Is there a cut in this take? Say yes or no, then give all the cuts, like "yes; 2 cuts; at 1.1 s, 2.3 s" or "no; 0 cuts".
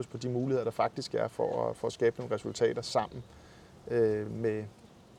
no; 0 cuts